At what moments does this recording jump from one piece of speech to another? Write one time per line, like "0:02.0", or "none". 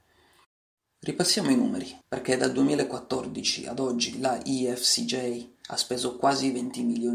0:02.0